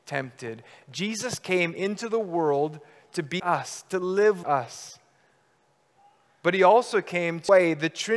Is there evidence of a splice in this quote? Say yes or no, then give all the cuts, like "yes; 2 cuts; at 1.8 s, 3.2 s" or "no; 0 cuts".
yes; 2 cuts; at 3.4 s, 4.4 s